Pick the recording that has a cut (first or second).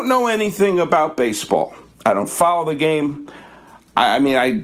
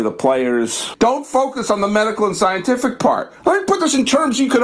second